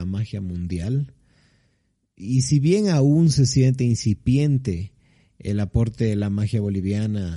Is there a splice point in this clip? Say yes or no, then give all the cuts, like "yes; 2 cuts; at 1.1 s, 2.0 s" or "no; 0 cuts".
no; 0 cuts